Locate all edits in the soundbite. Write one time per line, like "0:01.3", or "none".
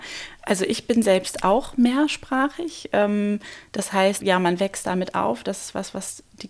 0:04.2